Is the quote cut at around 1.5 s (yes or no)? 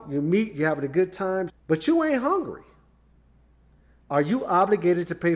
yes